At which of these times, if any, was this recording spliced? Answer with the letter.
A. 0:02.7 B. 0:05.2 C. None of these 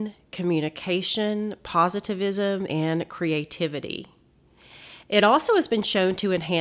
A